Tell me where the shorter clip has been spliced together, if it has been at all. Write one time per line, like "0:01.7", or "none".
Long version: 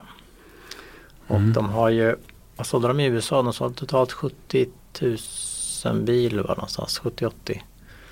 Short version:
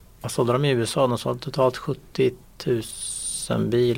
none